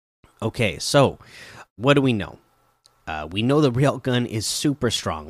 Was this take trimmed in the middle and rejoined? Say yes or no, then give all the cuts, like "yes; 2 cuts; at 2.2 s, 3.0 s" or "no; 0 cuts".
yes; 1 cut; at 1.6 s